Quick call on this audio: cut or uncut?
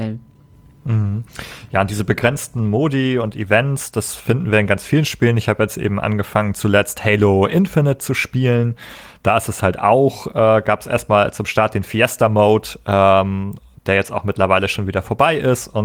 uncut